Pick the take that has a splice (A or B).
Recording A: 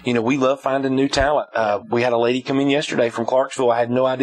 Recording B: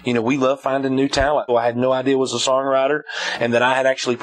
B